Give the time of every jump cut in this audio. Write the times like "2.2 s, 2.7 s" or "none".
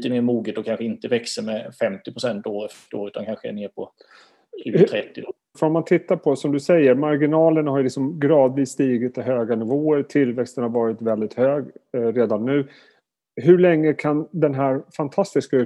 5.5 s